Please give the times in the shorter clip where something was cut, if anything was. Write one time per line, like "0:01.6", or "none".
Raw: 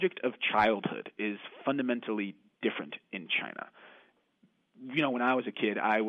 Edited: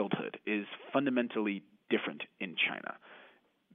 none